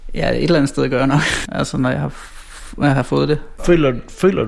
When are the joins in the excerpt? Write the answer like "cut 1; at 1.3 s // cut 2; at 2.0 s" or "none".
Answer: cut 1; at 1.5 s // cut 2; at 3.6 s